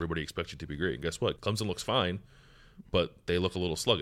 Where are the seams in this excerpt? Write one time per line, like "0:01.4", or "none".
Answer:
0:01.4